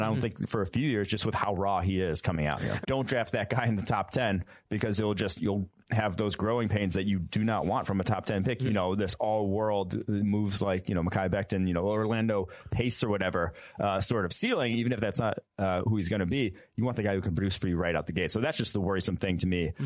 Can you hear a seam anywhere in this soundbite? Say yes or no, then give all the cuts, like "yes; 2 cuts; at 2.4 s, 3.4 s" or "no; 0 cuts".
yes; 2 cuts; at 2.8 s, 8.6 s